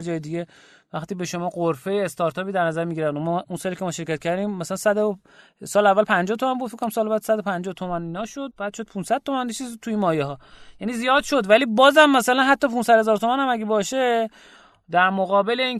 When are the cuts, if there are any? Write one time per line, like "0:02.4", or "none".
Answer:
0:08.5